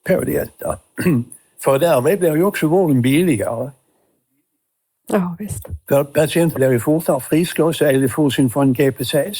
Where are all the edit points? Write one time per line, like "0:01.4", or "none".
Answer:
0:06.5